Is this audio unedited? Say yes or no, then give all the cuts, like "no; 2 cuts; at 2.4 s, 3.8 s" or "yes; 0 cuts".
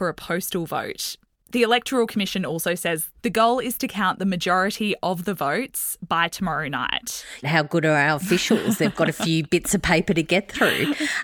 no; 1 cut; at 7.4 s